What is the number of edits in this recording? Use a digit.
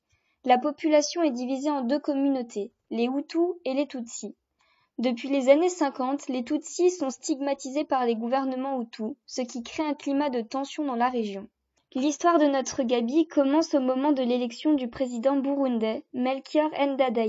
0